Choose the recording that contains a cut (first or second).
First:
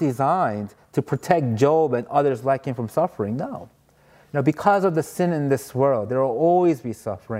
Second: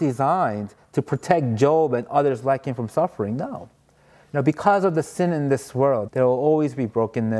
second